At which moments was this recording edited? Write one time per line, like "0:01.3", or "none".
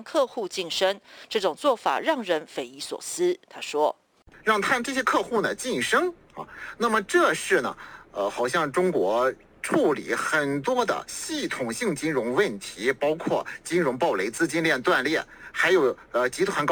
0:06.2